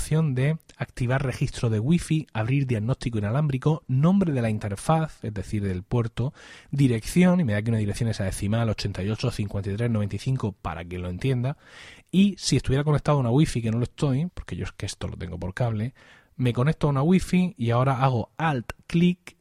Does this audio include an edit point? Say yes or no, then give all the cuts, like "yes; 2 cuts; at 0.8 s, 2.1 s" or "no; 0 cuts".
yes; 1 cut; at 14.3 s